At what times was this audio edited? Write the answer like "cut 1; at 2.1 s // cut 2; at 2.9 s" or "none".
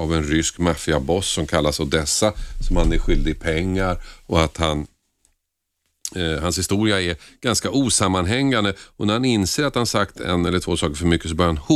none